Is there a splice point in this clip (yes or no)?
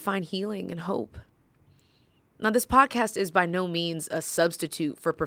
no